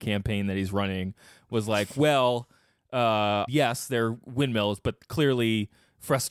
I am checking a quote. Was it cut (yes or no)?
yes